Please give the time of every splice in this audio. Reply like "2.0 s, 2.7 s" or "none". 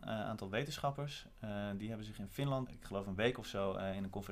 2.7 s